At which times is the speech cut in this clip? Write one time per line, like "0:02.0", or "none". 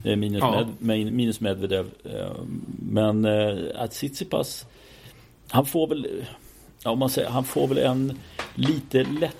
none